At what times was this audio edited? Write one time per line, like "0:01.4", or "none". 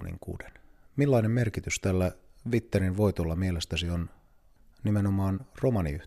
none